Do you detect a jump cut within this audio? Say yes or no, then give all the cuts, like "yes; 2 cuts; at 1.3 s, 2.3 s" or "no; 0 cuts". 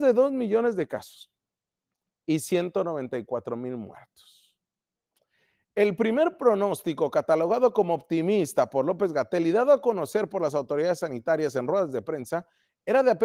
no; 0 cuts